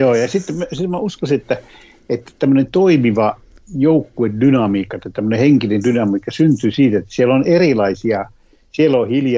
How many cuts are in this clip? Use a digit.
0